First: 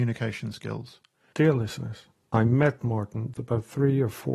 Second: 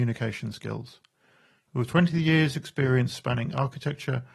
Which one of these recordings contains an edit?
first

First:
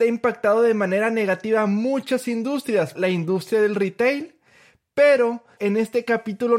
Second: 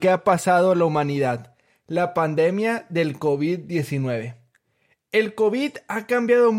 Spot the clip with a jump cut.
first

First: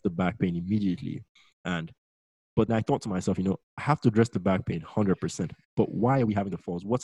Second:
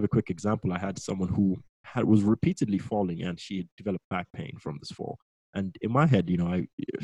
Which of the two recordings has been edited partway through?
first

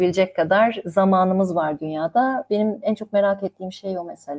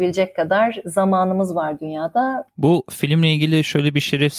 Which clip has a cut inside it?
second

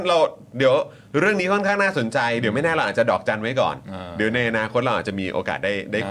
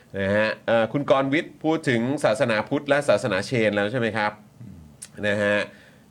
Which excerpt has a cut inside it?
second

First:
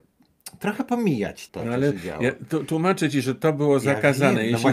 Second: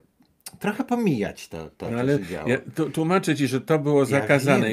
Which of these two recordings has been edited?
first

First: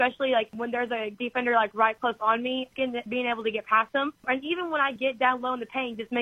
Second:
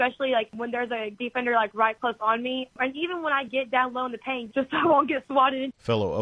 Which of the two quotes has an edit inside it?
second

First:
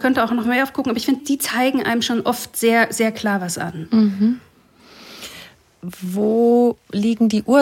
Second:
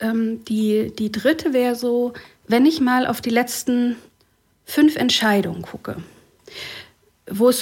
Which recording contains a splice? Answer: first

